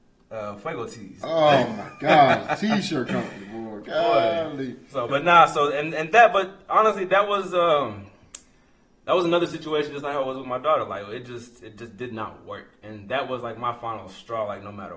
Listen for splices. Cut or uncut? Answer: cut